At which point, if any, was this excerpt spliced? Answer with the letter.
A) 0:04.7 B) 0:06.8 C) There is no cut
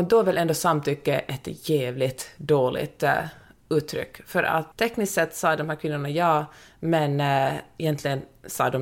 A